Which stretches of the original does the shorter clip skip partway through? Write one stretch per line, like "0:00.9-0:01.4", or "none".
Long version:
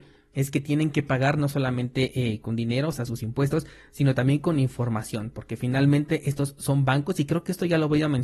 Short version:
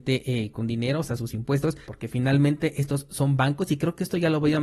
0:03.7-0:05.3